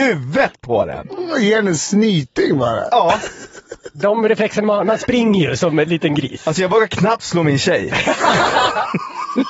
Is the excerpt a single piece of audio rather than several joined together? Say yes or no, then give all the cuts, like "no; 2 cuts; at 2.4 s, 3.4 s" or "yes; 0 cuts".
yes; 0 cuts